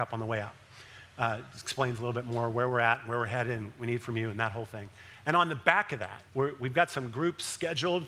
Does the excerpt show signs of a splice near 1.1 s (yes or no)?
no